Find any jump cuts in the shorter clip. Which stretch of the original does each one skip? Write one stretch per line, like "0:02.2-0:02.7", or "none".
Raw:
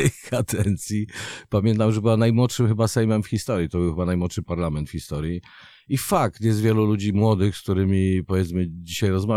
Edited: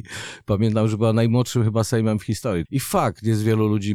0:03.7-0:05.8